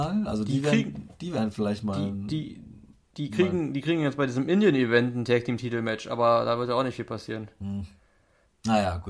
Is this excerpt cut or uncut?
uncut